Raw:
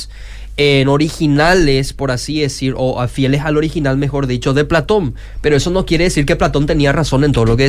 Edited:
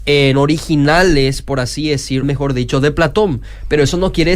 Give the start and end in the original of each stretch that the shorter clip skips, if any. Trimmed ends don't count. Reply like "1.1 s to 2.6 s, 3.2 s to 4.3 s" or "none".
2.7 s to 4.0 s